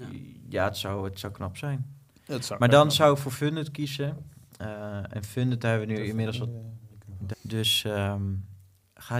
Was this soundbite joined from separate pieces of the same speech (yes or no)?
yes